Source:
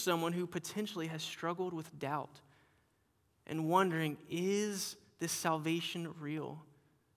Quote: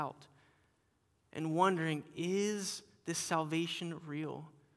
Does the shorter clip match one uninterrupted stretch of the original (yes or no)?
yes